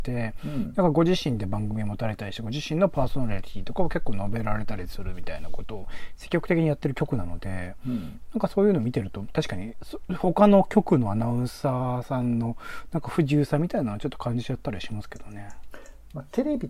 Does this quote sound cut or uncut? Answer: uncut